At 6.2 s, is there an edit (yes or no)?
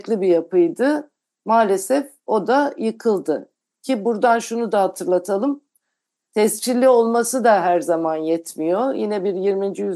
no